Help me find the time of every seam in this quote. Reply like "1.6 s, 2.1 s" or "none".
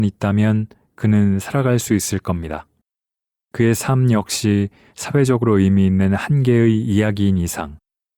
none